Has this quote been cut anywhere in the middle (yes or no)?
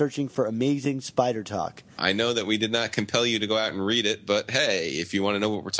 yes